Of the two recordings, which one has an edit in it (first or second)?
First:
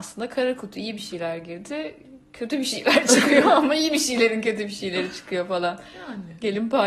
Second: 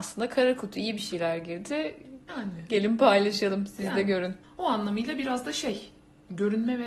second